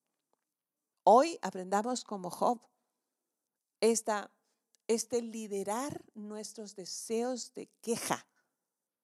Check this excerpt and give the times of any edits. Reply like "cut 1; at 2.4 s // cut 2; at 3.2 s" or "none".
cut 1; at 0.9 s